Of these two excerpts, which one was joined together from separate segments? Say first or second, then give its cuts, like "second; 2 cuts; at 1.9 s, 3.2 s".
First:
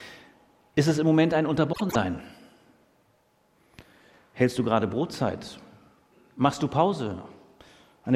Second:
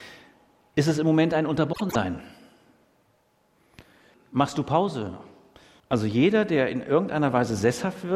second; 2 cuts; at 4.1 s, 5.8 s